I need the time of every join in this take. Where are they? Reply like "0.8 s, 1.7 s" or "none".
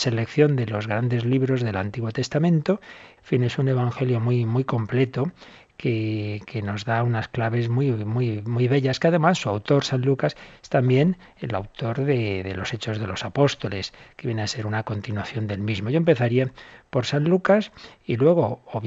3.2 s